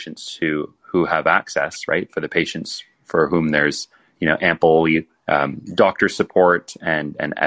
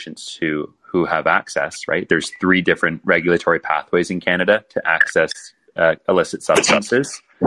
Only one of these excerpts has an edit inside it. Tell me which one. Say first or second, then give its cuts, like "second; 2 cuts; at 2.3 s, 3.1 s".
second; 1 cut; at 2.1 s